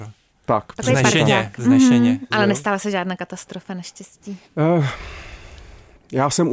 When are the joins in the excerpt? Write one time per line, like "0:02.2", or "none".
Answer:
0:02.3
0:04.4